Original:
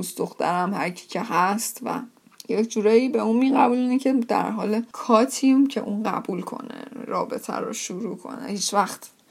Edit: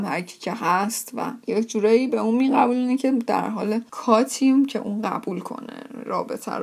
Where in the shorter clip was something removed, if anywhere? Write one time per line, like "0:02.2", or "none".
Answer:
0:01.4